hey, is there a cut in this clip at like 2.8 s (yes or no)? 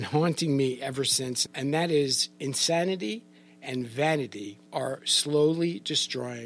no